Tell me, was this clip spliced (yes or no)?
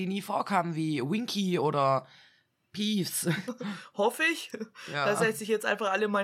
yes